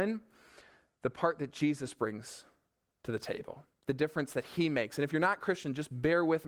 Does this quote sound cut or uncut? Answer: uncut